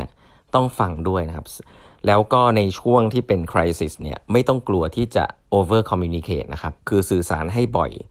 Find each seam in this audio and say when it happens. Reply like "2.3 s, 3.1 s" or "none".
6.8 s